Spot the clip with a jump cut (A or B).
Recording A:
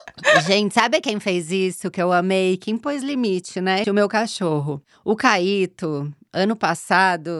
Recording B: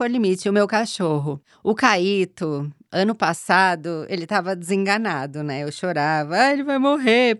A